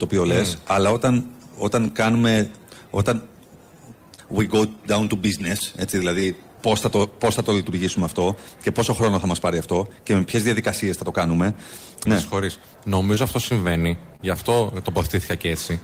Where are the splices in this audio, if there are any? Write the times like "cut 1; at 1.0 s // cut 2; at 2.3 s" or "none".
cut 1; at 12.1 s